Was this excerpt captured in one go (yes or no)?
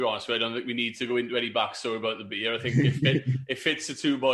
yes